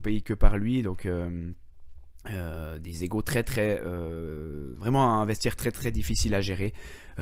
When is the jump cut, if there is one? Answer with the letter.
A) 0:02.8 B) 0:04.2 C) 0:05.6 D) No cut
D